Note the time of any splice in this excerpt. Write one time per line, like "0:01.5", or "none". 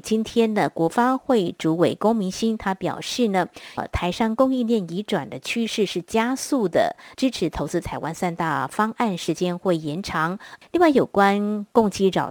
0:03.8
0:07.1
0:10.6